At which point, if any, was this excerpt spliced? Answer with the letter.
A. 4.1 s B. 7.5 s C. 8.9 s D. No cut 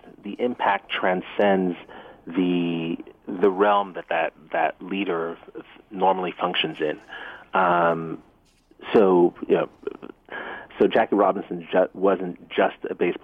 D